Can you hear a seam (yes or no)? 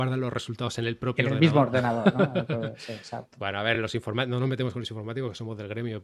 no